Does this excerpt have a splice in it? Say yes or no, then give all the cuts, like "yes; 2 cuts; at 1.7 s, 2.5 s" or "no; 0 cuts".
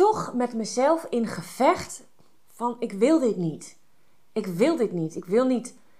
no; 0 cuts